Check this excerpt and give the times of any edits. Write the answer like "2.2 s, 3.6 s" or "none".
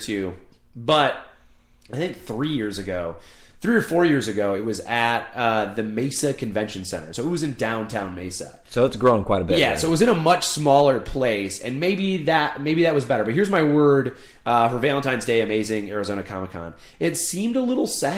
none